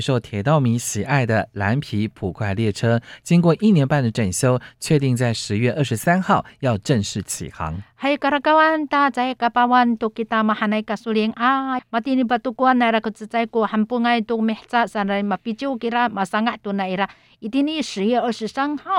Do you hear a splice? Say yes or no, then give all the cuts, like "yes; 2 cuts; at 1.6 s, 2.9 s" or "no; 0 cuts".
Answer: yes; 1 cut; at 11.8 s